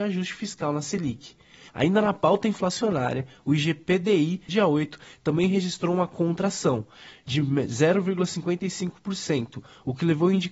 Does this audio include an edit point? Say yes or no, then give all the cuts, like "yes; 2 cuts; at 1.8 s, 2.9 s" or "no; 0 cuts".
yes; 2 cuts; at 1.7 s, 4.5 s